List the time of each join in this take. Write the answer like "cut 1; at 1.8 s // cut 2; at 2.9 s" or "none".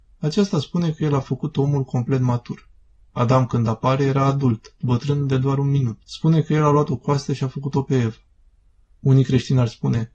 cut 1; at 4.8 s // cut 2; at 6.0 s